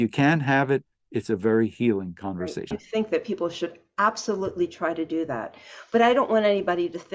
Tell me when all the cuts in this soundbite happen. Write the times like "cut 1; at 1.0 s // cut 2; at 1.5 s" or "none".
cut 1; at 2.7 s

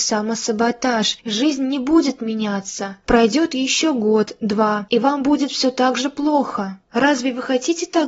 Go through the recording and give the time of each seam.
cut 1; at 1.2 s

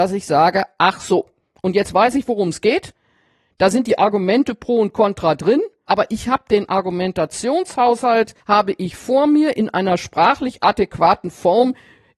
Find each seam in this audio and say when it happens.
cut 1; at 5.9 s // cut 2; at 8.4 s

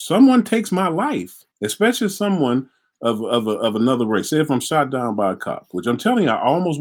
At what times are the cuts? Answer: cut 1; at 1.5 s

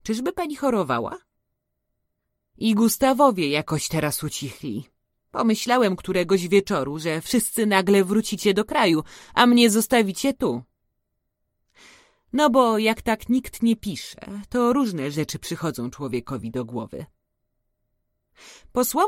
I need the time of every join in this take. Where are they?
cut 1; at 5.2 s

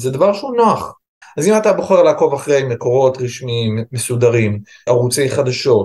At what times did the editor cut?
cut 1; at 1.2 s // cut 2; at 4.9 s

